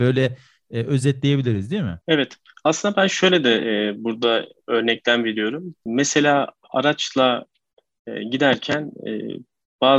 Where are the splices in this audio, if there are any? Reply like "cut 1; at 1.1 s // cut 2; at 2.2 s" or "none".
cut 1; at 2.0 s